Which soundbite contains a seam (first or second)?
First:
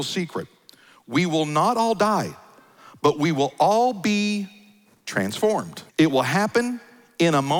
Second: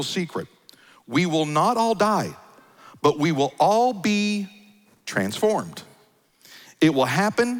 first